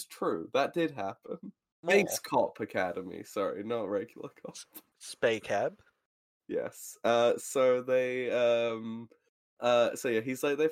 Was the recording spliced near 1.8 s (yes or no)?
yes